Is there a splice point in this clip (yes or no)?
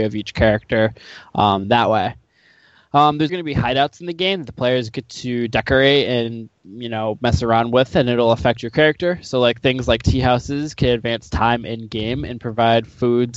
yes